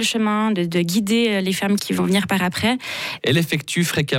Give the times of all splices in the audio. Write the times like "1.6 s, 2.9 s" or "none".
1.8 s, 3.2 s